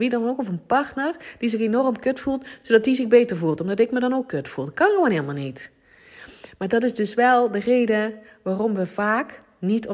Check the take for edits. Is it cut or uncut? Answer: uncut